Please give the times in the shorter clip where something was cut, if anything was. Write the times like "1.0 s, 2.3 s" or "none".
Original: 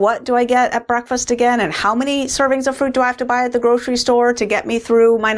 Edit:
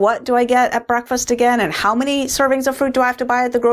none

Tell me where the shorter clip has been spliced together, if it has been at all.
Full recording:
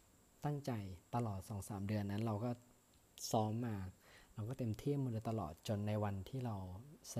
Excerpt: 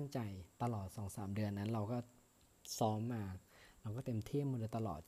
none

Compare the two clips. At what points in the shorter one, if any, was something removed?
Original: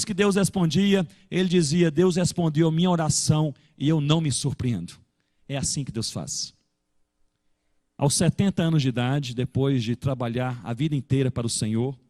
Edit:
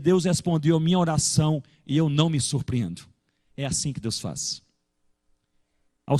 none

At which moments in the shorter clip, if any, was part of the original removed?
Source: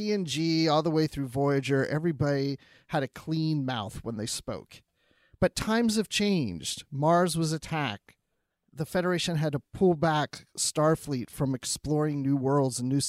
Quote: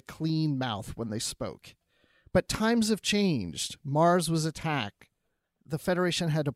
none

